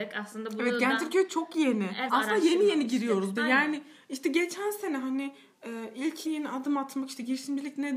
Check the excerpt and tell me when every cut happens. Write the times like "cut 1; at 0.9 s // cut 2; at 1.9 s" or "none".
cut 1; at 2.1 s // cut 2; at 3.4 s // cut 3; at 6.3 s

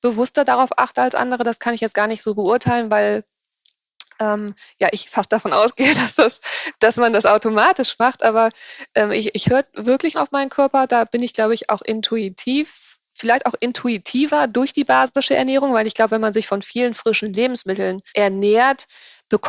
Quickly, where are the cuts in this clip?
cut 1; at 10.1 s // cut 2; at 18.1 s

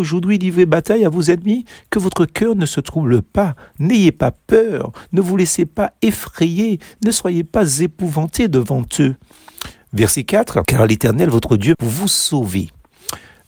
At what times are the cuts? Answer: cut 1; at 11.7 s

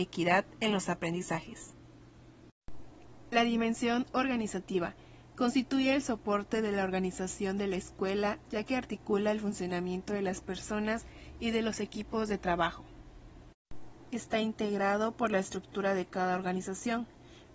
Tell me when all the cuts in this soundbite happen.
cut 1; at 14.1 s

